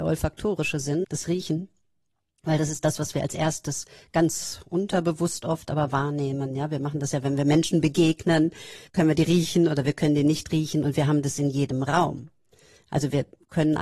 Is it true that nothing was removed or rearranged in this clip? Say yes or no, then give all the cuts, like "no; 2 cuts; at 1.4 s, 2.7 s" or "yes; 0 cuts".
no; 2 cuts; at 1.0 s, 8.9 s